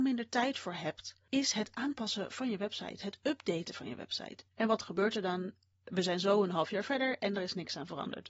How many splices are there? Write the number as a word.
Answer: one